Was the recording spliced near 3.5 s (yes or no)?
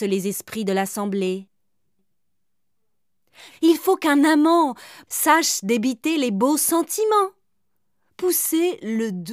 yes